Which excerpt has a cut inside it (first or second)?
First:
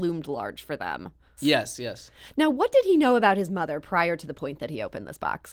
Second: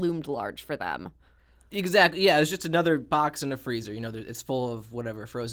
first